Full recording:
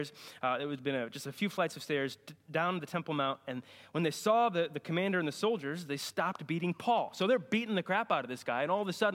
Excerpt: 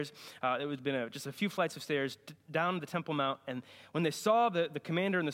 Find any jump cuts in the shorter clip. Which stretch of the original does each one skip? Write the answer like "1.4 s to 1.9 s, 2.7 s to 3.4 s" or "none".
none